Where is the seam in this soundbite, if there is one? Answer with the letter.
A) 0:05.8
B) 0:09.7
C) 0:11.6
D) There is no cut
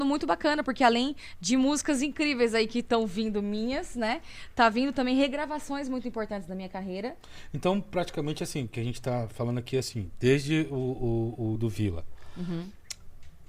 C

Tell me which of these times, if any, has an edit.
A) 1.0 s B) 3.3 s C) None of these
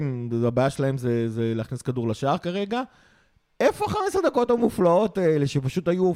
C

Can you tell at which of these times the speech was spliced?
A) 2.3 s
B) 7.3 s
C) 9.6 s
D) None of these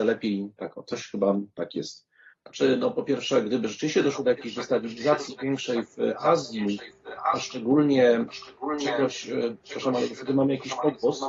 A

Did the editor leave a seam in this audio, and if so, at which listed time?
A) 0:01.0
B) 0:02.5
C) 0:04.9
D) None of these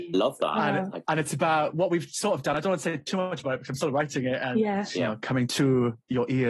D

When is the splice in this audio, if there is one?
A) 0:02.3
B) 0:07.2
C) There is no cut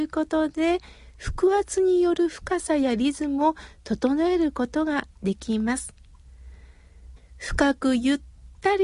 B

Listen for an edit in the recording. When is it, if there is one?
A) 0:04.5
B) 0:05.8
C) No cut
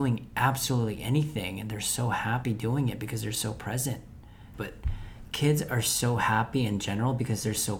A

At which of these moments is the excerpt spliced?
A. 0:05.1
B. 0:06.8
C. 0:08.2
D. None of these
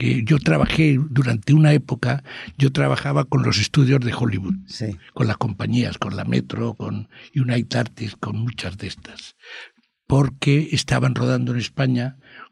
D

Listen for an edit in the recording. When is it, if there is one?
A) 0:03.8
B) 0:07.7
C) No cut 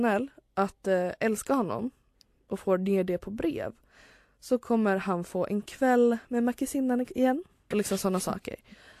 B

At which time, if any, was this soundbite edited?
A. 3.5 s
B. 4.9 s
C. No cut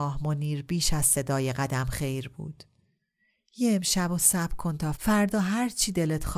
B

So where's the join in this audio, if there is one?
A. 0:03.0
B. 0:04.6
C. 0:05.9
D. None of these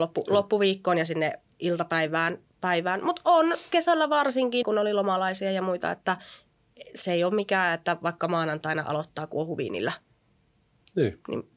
B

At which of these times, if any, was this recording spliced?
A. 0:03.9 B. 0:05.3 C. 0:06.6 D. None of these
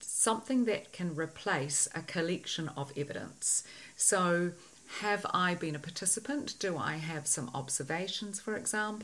A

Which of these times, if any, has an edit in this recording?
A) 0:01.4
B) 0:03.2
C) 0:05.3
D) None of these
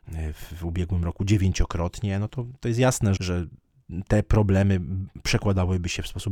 B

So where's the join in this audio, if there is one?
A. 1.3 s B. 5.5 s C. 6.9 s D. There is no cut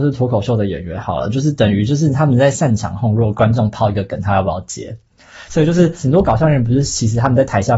B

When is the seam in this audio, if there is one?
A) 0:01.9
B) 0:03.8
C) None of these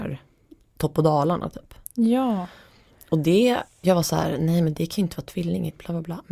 B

